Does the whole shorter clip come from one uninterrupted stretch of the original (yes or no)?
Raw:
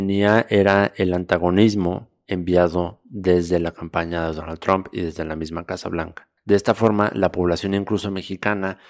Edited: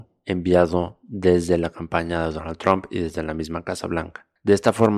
yes